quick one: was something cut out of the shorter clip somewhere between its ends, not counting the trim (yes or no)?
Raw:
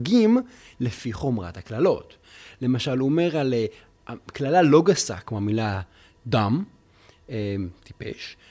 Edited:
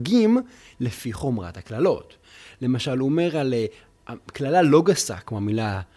no